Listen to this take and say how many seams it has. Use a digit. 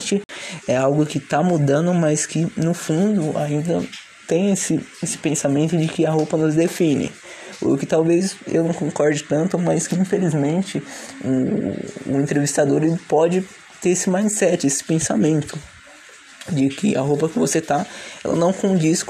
0